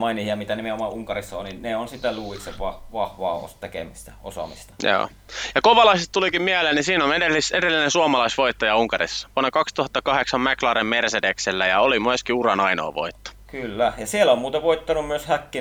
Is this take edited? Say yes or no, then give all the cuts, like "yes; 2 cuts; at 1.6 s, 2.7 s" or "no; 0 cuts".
no; 0 cuts